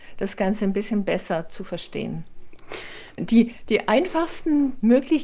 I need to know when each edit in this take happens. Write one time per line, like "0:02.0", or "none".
0:03.2